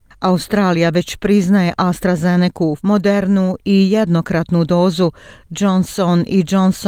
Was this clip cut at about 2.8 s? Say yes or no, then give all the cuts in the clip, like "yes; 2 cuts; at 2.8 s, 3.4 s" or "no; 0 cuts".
yes; 1 cut; at 2.8 s